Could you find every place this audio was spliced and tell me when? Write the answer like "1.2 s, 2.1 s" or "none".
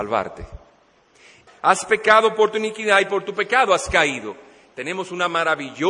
1.5 s